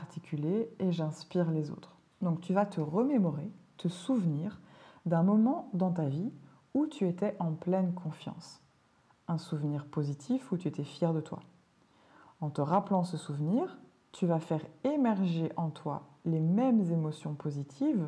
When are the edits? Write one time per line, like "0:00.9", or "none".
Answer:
0:02.1